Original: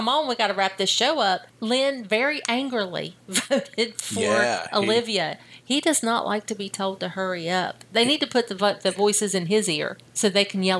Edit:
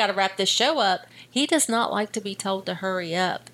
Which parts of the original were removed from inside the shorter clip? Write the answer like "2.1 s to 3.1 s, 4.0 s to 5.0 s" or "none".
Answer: 1.5 s to 5.4 s